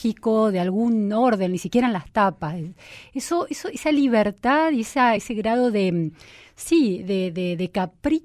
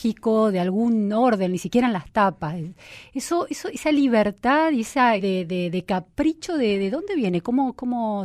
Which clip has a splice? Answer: second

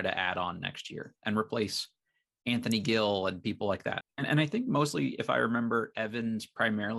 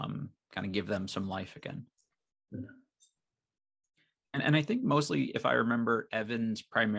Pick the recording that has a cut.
first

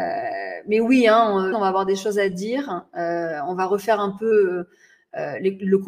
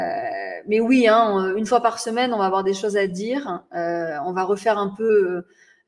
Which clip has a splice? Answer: first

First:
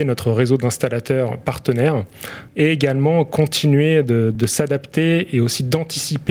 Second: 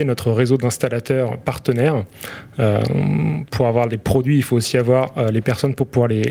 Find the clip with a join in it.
first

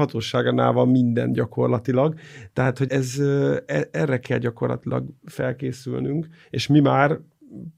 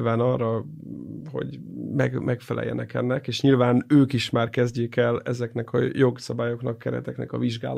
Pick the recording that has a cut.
first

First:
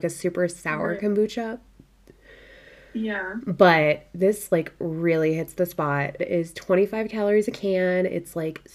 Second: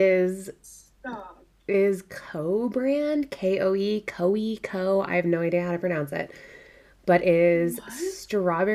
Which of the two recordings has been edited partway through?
first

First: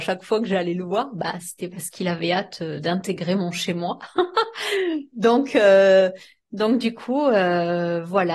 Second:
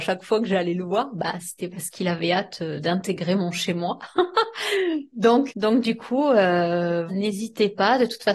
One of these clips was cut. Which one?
second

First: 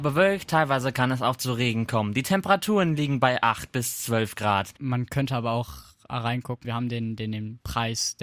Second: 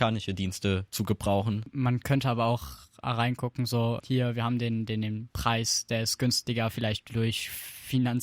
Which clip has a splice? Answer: first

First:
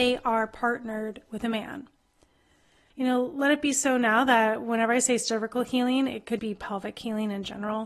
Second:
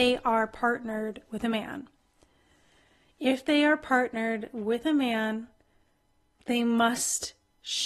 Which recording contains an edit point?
first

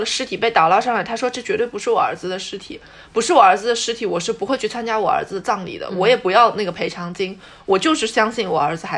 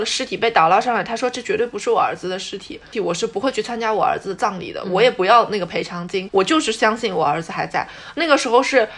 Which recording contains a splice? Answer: second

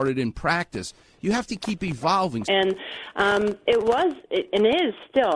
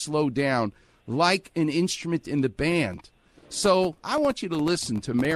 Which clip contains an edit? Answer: first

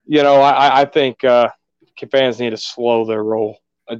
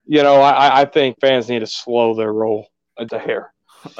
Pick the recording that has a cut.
second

